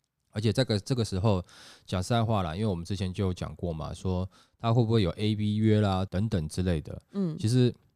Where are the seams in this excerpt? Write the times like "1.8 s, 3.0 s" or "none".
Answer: 6.1 s